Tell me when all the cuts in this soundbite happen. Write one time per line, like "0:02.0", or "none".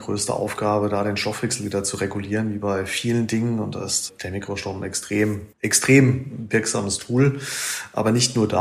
0:05.5